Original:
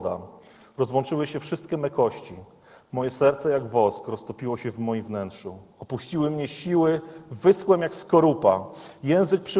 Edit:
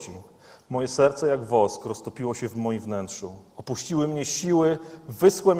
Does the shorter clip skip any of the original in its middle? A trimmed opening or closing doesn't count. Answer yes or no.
no